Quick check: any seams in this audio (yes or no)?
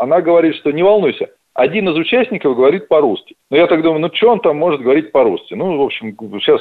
yes